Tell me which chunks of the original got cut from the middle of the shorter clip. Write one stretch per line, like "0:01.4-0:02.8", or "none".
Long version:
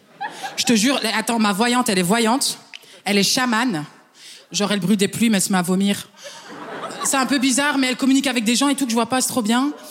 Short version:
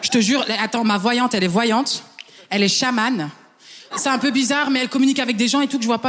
0:04.5-0:07.0